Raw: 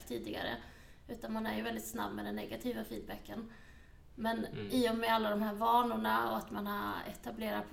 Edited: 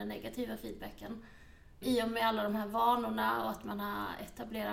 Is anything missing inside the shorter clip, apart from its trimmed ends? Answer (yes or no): yes